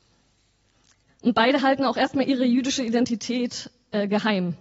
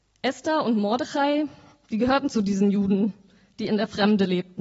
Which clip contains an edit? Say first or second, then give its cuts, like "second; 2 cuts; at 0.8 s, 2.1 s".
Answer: first; 1 cut; at 1.1 s